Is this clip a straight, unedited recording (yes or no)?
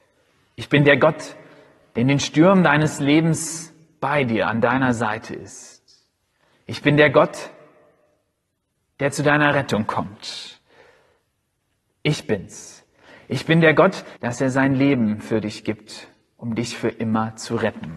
no